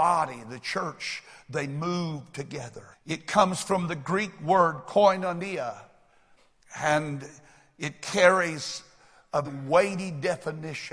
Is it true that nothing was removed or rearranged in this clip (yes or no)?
no